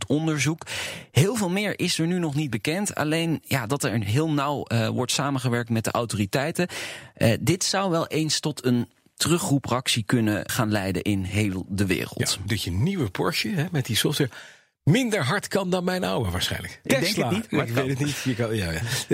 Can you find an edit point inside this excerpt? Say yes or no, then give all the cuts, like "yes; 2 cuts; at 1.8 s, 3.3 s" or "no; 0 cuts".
yes; 2 cuts; at 10.5 s, 12.5 s